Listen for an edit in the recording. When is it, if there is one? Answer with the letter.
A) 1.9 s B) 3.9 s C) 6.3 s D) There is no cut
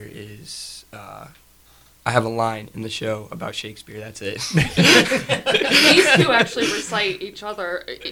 D